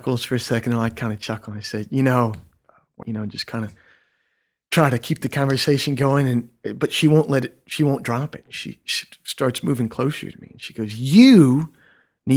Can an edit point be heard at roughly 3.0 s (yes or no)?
yes